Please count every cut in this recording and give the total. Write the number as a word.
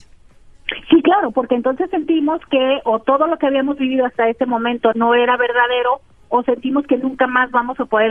one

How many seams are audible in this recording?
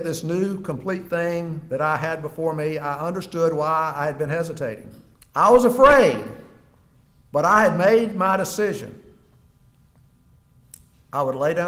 one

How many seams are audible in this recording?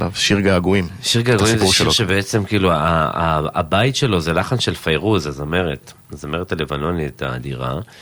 zero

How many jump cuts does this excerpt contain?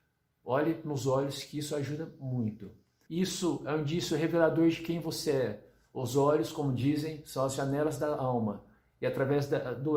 one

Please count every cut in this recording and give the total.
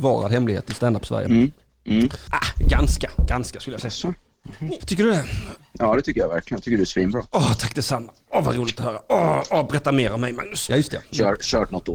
three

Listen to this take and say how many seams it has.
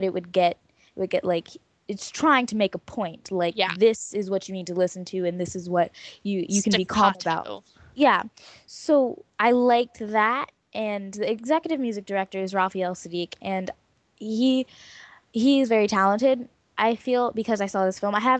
zero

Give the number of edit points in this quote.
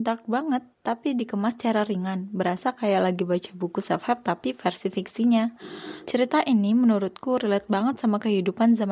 one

